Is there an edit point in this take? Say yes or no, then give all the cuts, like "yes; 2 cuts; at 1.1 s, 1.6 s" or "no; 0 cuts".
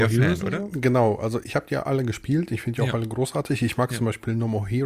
yes; 1 cut; at 1.4 s